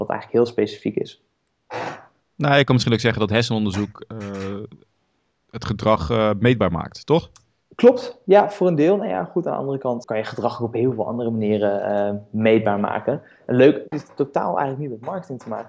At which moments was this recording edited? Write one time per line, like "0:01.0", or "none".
0:10.0
0:13.9